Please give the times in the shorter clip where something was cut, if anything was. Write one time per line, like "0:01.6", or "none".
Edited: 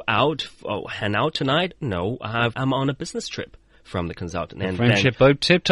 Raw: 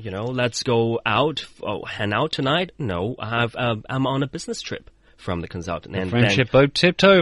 0:02.5